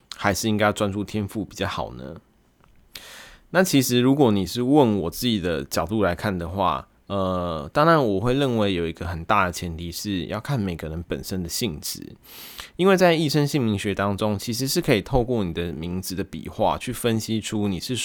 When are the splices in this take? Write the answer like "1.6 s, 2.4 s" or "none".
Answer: none